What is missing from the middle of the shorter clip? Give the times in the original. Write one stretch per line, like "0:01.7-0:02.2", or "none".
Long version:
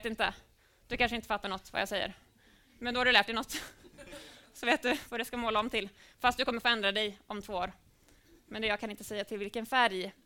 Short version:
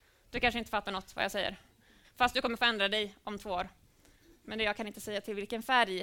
0:02.6-0:06.1